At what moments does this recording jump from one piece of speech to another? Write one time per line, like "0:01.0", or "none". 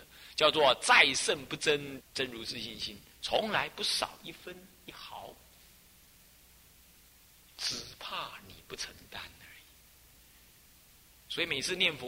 0:02.0

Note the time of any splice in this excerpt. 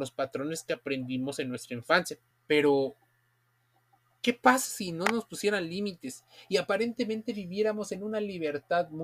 0:02.3

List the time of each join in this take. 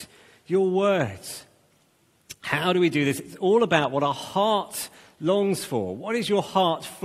none

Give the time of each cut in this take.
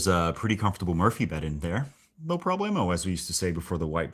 0:02.1

